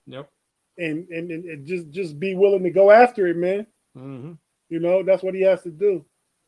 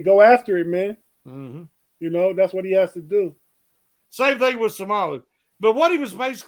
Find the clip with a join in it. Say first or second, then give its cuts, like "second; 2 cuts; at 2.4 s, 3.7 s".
second; 1 cut; at 4.0 s